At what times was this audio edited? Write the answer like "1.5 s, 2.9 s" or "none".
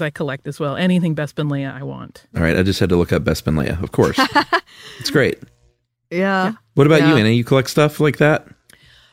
none